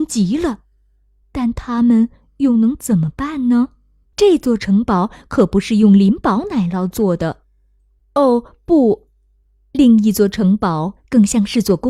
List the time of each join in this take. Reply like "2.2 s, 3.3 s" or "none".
4.0 s